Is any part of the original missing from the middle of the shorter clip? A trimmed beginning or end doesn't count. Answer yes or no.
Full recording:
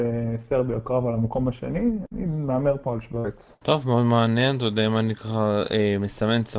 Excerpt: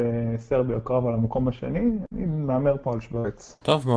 no